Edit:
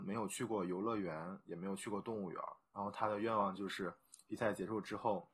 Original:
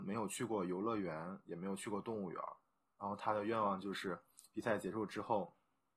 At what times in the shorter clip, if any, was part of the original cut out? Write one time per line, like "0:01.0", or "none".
0:02.6